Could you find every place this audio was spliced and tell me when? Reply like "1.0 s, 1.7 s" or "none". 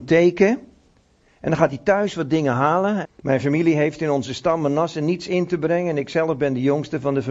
3.0 s